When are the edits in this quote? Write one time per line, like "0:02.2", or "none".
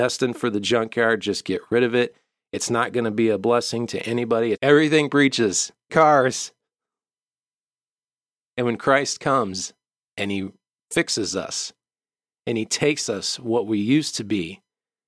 0:04.5
0:05.9

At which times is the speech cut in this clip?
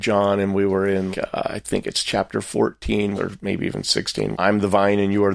0:01.1
0:03.2
0:04.3

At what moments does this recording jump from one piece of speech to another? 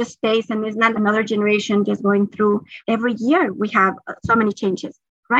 0:00.9

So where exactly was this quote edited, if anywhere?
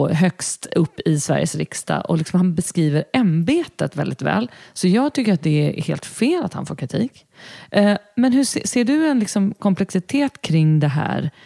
none

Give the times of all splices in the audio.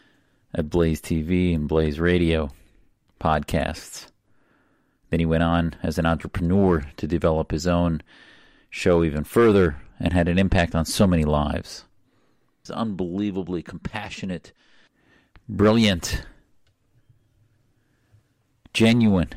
0:12.7

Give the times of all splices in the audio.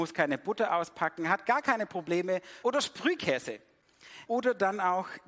0:02.6
0:04.3

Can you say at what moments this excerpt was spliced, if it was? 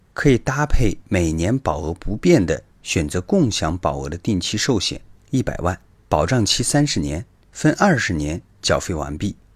0:02.7

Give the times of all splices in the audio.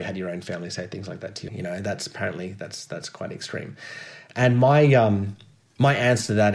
0:01.5

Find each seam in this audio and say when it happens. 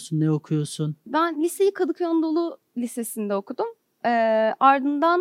none

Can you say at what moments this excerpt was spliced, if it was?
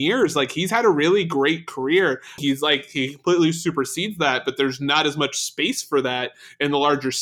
0:02.4

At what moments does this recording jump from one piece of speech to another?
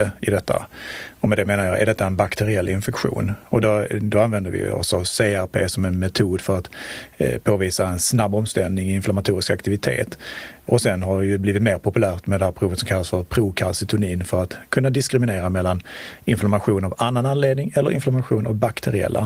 none

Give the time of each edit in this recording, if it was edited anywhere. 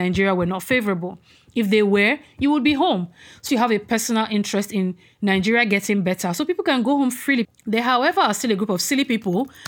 0:03.5
0:07.4

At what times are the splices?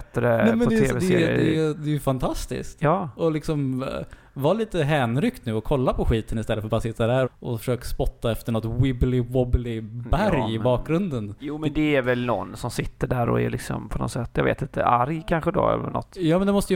0:07.2

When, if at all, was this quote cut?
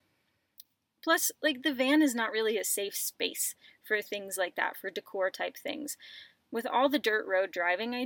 none

